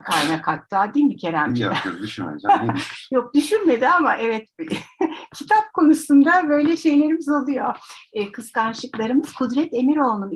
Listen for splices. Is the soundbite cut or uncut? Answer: uncut